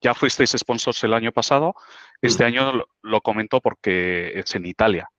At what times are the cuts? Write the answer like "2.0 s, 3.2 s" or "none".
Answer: none